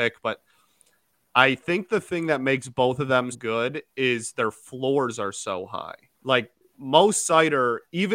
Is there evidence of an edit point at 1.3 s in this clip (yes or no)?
no